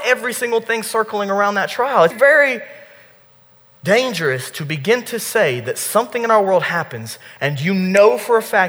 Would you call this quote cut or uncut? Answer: cut